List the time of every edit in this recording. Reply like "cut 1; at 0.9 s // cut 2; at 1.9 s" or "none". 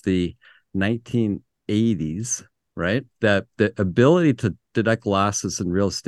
cut 1; at 3.1 s